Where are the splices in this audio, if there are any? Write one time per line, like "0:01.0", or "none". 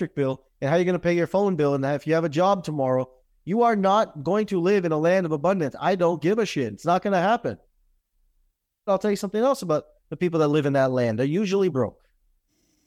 0:08.9